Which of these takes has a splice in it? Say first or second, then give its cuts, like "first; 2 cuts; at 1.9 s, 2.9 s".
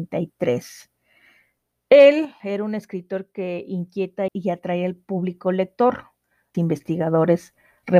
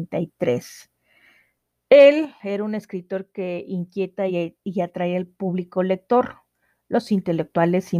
first; 2 cuts; at 4.3 s, 6.5 s